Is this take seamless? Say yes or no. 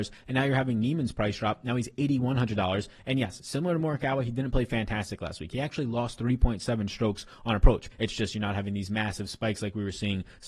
no